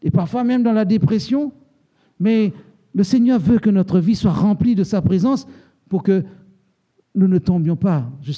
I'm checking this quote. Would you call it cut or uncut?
uncut